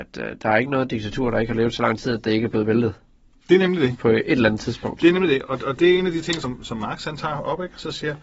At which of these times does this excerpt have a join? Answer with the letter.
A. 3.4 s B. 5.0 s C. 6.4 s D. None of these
D